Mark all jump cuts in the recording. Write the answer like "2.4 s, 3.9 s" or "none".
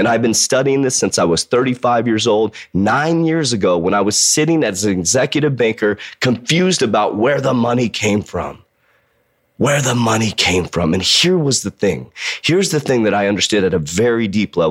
none